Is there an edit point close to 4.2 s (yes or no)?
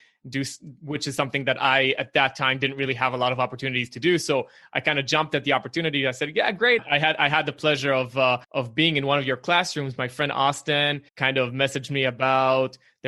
no